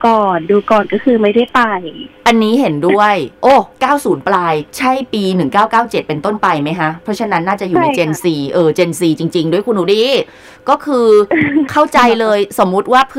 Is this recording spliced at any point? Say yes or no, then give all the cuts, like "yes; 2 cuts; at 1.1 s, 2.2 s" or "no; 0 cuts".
yes; 2 cuts; at 3.3 s, 4.7 s